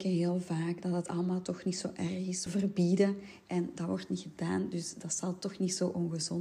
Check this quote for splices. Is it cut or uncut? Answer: cut